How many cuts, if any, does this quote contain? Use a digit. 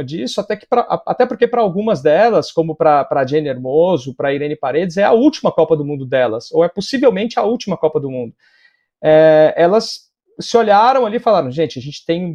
0